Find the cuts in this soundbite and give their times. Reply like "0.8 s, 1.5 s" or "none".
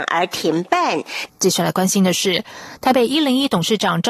1.3 s